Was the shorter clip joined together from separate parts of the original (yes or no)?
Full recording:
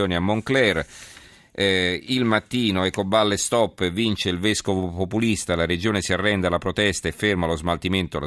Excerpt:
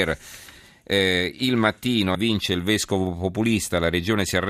yes